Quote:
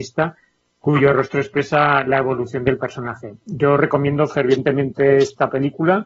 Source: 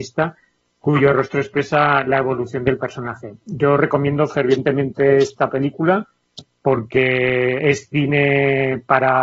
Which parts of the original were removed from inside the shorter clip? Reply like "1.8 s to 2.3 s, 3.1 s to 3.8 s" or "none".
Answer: none